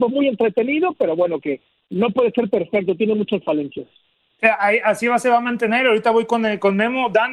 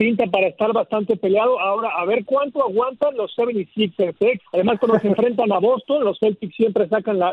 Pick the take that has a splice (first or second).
second